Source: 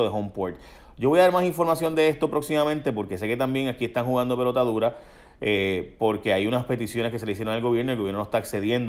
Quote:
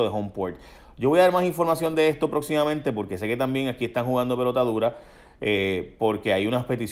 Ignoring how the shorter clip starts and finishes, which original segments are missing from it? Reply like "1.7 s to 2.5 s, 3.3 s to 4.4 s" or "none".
none